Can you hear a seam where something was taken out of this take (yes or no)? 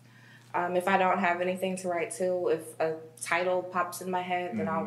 no